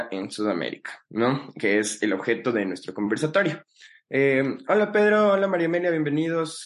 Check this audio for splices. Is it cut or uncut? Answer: uncut